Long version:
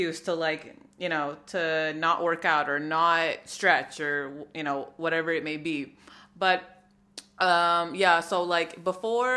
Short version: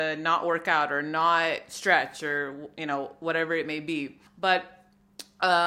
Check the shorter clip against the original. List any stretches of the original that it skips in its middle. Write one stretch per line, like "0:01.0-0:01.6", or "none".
0:06.0-0:06.2